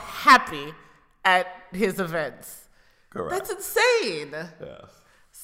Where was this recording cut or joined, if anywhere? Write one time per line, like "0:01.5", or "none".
none